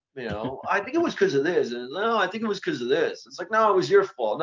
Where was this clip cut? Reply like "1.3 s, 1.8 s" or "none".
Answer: none